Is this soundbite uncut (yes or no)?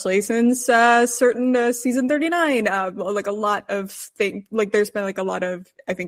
yes